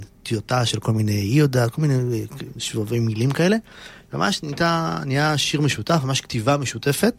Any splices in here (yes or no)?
no